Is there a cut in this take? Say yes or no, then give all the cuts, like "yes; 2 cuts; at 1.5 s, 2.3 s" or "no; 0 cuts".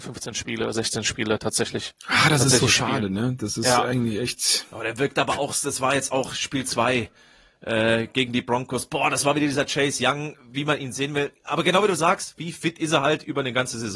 no; 0 cuts